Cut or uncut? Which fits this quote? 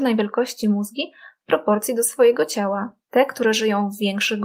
cut